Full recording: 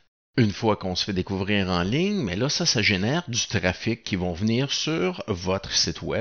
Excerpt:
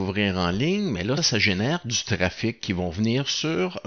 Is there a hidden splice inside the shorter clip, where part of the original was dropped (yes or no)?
yes